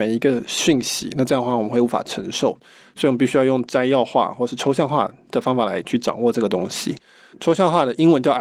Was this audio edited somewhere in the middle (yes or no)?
yes